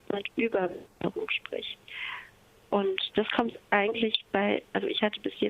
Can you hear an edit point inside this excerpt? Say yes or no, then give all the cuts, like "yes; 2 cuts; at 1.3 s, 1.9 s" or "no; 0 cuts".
yes; 1 cut; at 0.9 s